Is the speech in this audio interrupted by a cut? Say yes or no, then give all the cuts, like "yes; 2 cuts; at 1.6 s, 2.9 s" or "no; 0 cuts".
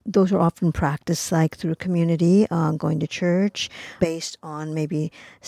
yes; 1 cut; at 4.0 s